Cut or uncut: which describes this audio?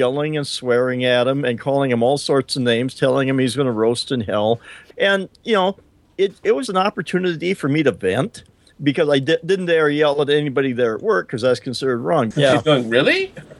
cut